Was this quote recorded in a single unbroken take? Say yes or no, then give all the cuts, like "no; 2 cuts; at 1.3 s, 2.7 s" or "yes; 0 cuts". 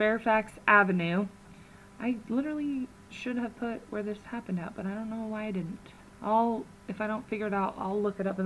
yes; 0 cuts